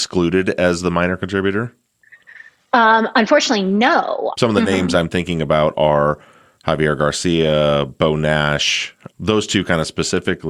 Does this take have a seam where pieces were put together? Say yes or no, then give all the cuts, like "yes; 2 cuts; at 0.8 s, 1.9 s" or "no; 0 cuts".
yes; 2 cuts; at 4.3 s, 9.1 s